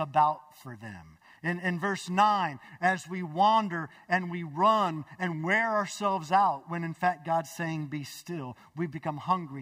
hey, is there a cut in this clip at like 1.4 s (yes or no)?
yes